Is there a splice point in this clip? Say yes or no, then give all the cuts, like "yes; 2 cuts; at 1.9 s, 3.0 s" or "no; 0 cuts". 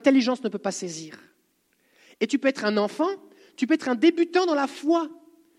no; 0 cuts